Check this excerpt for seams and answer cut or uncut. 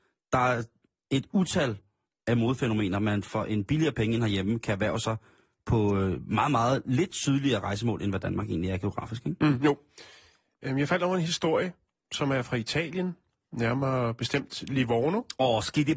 uncut